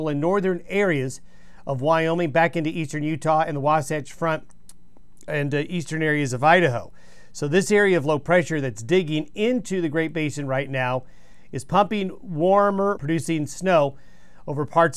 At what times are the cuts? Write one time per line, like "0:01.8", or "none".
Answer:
0:13.0